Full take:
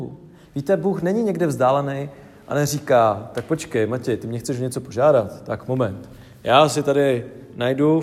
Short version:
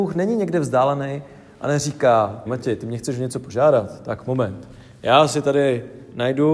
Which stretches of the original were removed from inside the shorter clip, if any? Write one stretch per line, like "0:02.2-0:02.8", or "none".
0:03.3-0:03.9